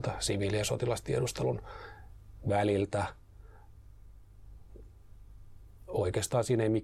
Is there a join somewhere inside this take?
no; 0 cuts

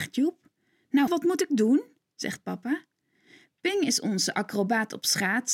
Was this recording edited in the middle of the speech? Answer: yes; 1 cut; at 1.1 s

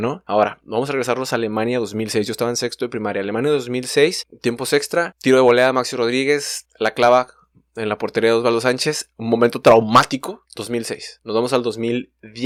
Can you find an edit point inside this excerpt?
no; 0 cuts

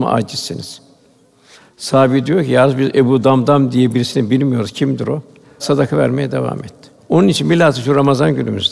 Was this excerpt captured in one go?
no; 2 cuts; at 5.4 s, 7.0 s

